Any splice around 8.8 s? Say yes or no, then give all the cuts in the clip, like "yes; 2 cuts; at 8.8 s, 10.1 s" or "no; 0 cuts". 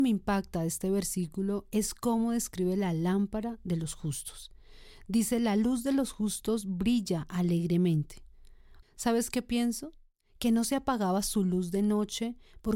yes; 1 cut; at 8.8 s